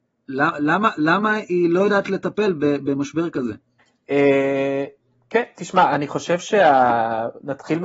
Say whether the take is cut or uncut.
uncut